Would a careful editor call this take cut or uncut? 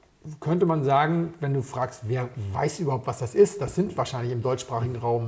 uncut